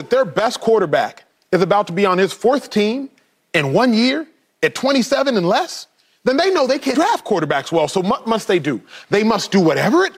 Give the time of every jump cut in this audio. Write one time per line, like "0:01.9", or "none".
0:06.9